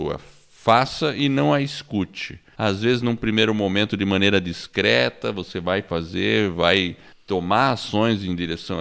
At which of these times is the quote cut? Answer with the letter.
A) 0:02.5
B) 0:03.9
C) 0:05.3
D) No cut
A